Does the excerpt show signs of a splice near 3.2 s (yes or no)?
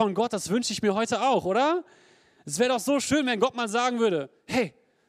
no